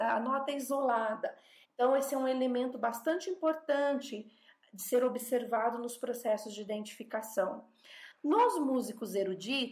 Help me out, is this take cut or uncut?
cut